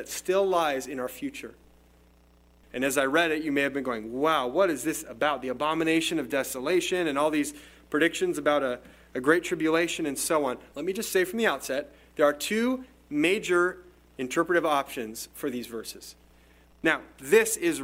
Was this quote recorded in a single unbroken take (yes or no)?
no